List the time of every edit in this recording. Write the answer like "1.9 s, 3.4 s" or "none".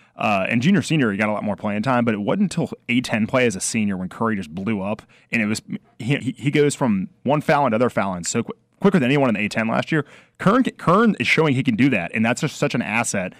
6.2 s